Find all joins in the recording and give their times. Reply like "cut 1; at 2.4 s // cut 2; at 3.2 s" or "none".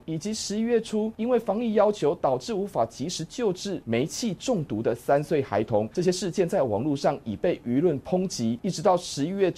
none